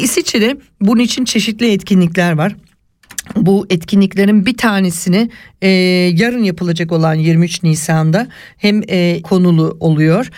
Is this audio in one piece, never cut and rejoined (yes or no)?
no